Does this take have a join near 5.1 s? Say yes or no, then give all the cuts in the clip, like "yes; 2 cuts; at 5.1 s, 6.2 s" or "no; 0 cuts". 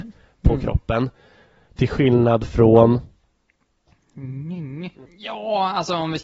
yes; 1 cut; at 5.1 s